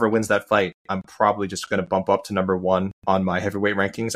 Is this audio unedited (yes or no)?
no